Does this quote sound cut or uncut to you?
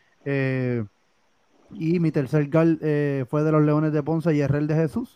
uncut